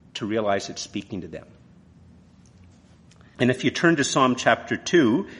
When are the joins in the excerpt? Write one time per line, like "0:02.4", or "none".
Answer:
0:03.4